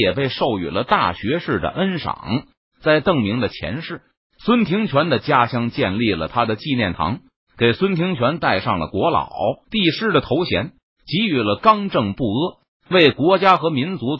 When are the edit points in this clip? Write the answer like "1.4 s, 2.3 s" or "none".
9.6 s